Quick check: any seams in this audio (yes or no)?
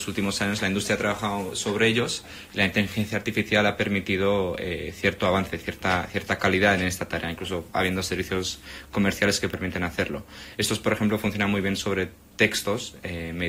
no